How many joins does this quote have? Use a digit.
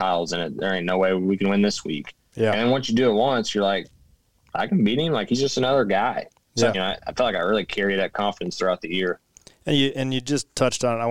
1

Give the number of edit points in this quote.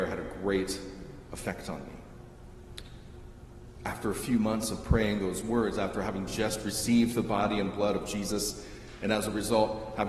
0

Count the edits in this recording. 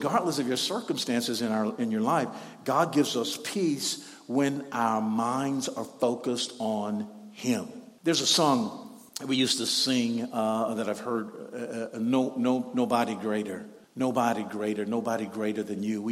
0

